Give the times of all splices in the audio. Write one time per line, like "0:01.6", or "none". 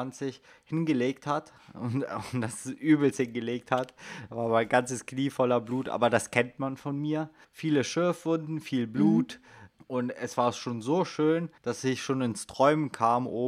0:07.4
0:09.8
0:11.6